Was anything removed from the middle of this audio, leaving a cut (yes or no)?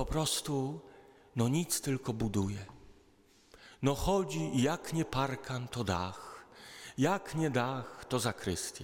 no